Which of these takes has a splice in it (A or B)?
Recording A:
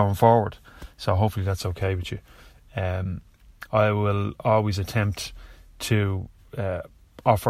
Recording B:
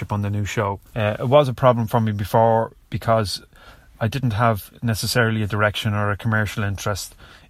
B